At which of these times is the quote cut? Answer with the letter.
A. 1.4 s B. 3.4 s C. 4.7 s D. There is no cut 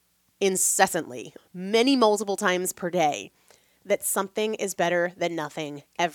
A